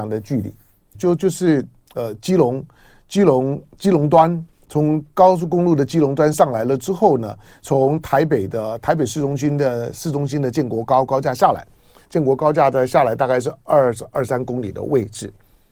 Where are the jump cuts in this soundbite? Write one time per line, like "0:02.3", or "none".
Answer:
0:00.9